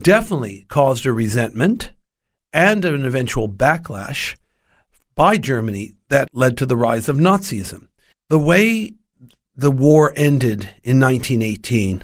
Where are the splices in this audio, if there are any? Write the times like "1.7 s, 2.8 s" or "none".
6.3 s, 8.1 s

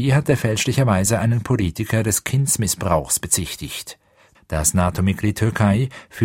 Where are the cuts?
4.3 s

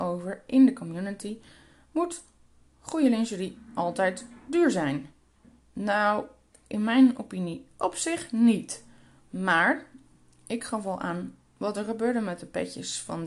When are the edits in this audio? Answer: none

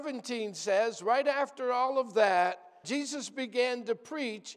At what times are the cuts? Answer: 2.8 s

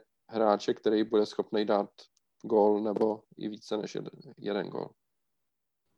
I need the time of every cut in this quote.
none

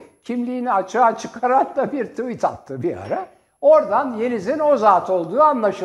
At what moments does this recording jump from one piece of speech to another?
none

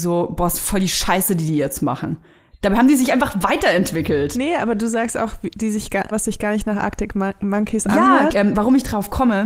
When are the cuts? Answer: 6.1 s, 8.3 s

